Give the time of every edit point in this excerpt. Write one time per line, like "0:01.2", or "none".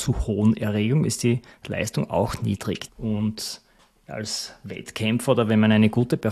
0:02.9